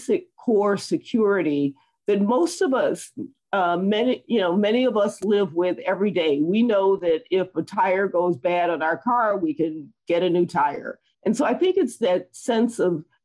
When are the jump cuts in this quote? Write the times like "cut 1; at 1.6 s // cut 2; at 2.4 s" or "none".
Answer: cut 1; at 11.1 s

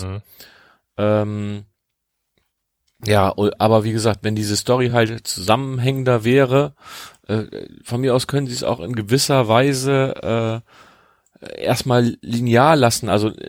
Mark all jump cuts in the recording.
none

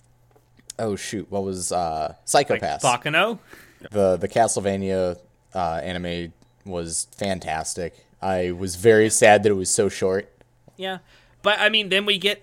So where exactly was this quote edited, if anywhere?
cut 1; at 3.8 s // cut 2; at 7.1 s

